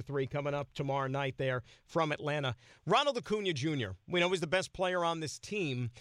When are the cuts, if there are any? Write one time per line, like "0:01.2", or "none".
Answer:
none